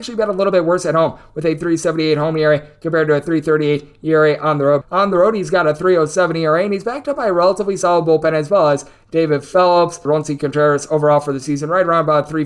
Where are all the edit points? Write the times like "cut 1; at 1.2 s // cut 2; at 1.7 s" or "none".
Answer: cut 1; at 4.8 s // cut 2; at 10.1 s

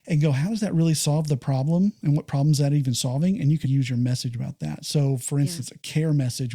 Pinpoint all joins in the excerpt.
cut 1; at 3.6 s

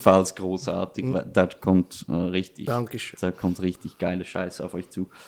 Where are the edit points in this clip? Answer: none

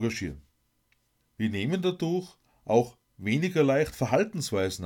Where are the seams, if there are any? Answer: cut 1; at 1.2 s

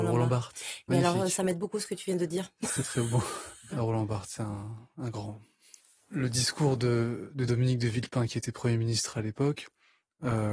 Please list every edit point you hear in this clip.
cut 1; at 3.7 s

